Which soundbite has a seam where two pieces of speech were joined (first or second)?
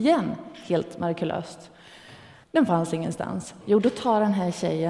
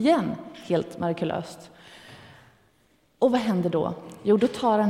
first